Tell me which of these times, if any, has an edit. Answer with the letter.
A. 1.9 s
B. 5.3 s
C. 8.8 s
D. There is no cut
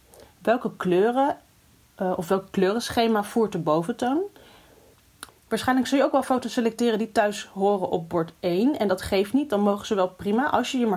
B